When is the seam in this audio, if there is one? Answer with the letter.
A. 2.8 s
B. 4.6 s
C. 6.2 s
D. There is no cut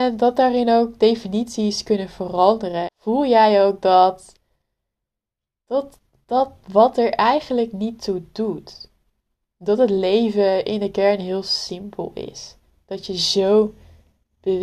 A